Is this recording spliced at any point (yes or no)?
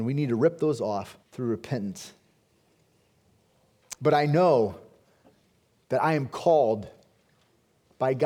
yes